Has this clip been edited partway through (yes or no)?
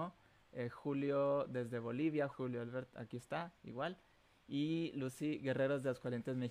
yes